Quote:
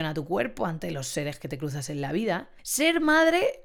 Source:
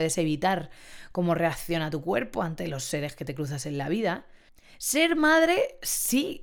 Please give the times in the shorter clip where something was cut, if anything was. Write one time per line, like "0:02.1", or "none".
0:02.6